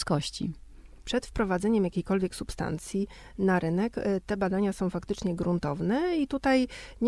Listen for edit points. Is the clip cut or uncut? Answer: cut